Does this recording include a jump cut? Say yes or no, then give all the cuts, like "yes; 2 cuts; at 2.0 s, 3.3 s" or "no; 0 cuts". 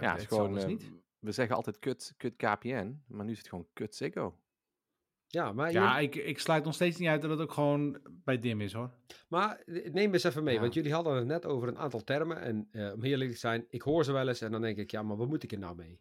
no; 0 cuts